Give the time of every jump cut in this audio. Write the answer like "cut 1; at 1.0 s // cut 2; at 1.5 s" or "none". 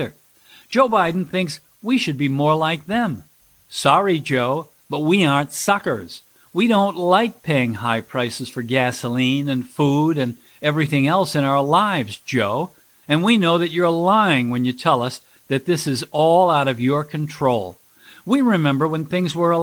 none